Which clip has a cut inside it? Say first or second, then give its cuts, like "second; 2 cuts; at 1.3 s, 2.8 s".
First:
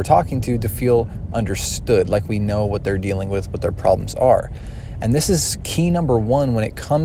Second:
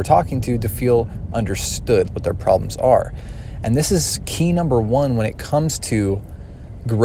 second; 1 cut; at 2.1 s